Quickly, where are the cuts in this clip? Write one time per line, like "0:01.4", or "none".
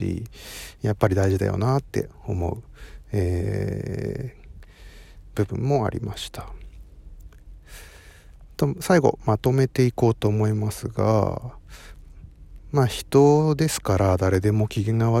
none